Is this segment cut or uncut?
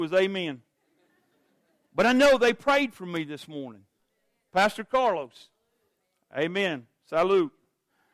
uncut